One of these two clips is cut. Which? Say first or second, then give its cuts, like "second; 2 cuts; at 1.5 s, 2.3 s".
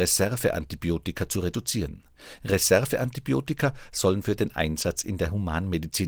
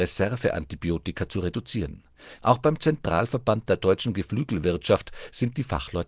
second; 1 cut; at 2.4 s